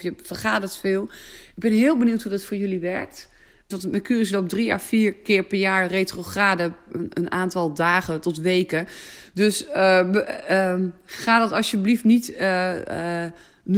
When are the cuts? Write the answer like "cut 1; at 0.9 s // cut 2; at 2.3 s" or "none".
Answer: cut 1; at 3.7 s